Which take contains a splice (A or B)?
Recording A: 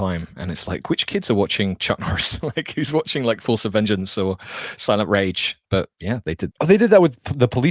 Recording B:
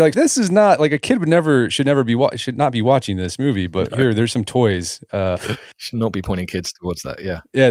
A